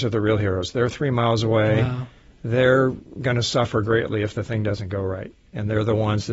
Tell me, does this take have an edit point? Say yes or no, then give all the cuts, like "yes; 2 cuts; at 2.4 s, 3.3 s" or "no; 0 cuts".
no; 0 cuts